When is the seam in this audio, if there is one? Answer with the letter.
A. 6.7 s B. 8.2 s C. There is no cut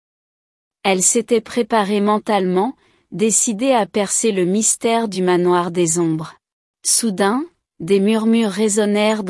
A